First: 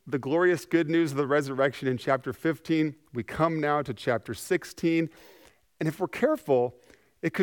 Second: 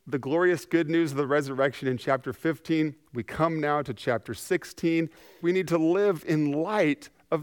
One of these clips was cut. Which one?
second; 1 cut; at 5.4 s

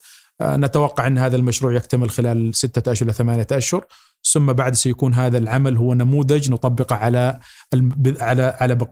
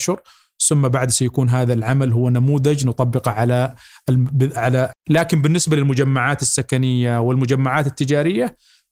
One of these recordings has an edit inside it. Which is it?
second; 1 cut; at 4.9 s

